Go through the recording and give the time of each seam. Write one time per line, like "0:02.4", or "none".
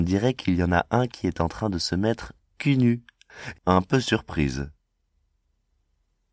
0:03.5